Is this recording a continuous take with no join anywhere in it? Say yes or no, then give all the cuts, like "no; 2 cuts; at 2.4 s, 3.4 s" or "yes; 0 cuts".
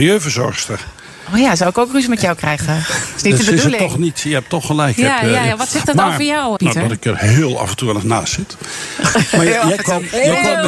no; 1 cut; at 6.6 s